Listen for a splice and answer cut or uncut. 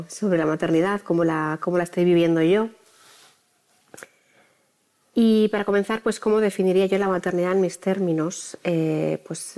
uncut